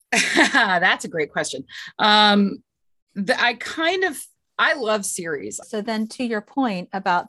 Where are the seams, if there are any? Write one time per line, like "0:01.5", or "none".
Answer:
0:05.6